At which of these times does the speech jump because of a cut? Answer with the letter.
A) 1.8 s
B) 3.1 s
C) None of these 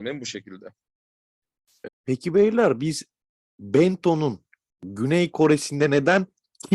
A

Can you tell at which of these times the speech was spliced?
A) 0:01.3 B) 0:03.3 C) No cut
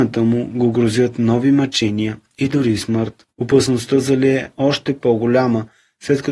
B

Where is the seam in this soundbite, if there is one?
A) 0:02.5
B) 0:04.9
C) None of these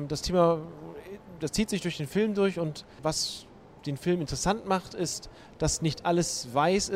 C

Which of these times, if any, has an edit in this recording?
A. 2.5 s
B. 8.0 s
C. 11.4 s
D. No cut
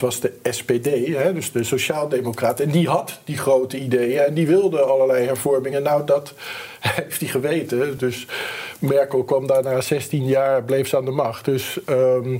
D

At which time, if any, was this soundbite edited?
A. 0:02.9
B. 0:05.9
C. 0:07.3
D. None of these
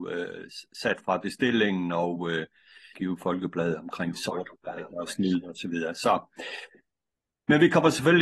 A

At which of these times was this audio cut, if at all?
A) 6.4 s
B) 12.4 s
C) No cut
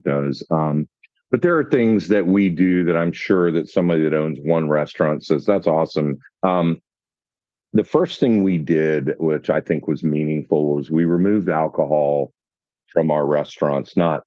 A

